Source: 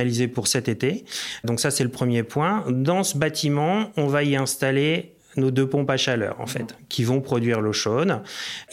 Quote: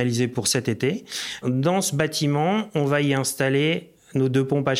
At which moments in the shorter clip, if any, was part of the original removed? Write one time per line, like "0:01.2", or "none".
0:01.4